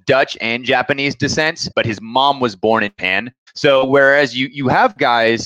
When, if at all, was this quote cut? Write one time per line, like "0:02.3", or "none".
0:01.7